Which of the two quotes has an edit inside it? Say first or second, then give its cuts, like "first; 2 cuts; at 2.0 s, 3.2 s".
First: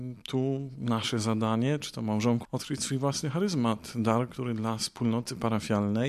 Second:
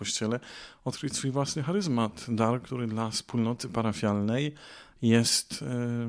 first; 1 cut; at 2.4 s